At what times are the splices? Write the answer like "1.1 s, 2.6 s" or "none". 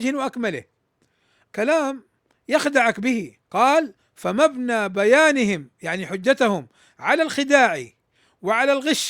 1.4 s, 3.4 s